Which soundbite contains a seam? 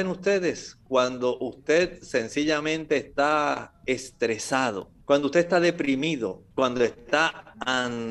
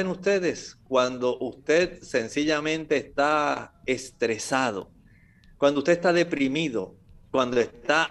first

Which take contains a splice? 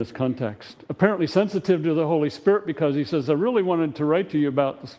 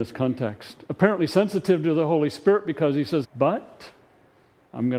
second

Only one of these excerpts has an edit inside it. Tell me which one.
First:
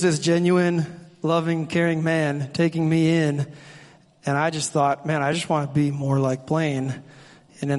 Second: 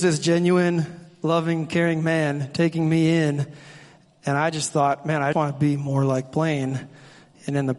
second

